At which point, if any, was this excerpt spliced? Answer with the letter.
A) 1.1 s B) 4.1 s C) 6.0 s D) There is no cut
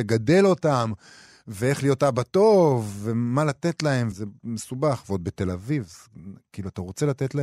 B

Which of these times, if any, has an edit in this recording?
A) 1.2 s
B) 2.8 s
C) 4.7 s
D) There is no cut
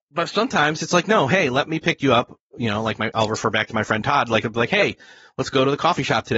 D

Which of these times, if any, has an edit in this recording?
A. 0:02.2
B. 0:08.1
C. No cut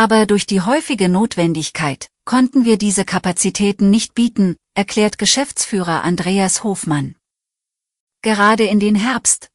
A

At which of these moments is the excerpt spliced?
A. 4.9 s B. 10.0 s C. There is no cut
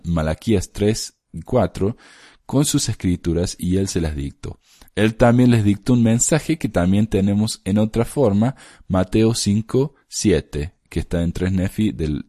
C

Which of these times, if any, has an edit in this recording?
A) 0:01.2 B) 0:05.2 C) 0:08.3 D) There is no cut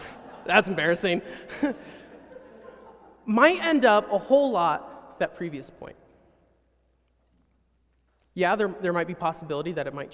B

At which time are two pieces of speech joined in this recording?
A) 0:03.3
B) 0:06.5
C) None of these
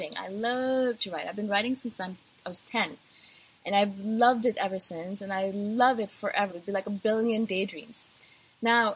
B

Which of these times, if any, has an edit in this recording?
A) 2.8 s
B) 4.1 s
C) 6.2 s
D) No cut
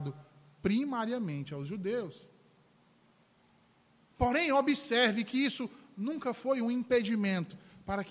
B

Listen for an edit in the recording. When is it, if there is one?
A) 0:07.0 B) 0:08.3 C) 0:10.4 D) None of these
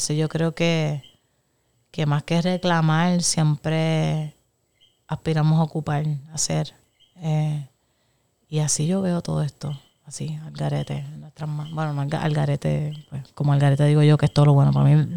B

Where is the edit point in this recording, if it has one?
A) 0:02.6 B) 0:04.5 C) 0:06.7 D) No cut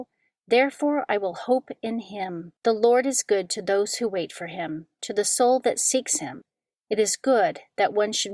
A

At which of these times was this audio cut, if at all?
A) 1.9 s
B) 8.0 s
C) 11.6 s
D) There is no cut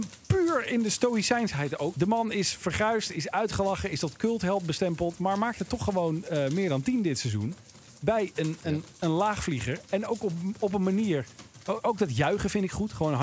A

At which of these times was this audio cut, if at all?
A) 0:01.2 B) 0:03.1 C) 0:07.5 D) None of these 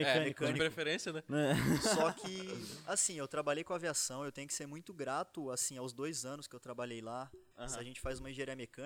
C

